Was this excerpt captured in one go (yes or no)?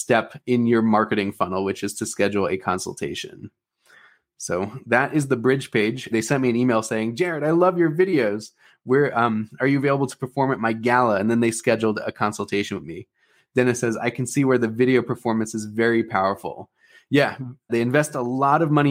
no